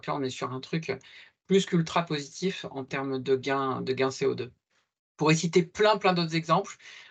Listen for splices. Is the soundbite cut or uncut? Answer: uncut